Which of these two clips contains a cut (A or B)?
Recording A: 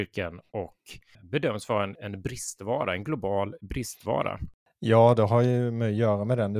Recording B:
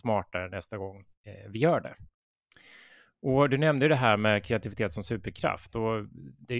A